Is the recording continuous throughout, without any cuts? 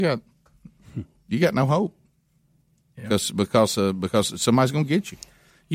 yes; 0 cuts

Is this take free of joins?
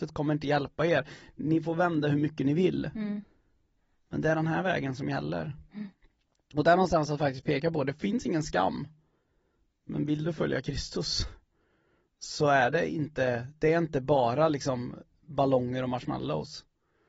yes; 0 cuts

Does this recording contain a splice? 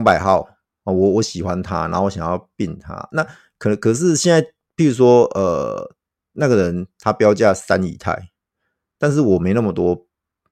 no; 0 cuts

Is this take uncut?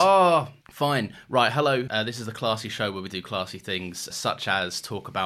no; 2 cuts; at 1.9 s, 4.1 s

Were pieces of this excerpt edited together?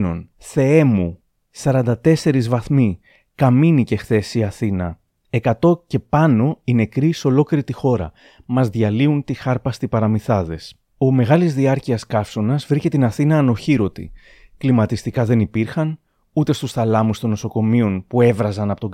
no; 0 cuts

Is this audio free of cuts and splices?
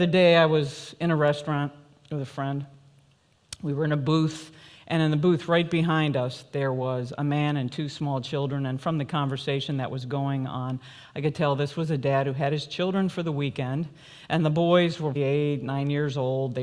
no; 1 cut; at 15.2 s

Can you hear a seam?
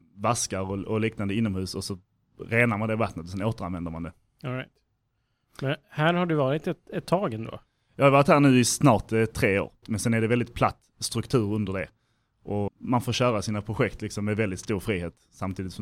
yes; 2 cuts; at 9.8 s, 12.7 s

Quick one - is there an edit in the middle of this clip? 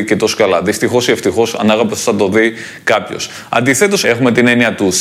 yes; 1 cut; at 4.0 s

